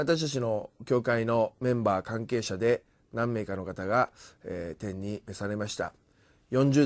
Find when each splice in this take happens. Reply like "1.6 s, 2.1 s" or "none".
none